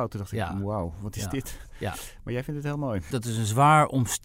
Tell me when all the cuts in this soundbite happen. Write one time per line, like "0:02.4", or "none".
0:03.1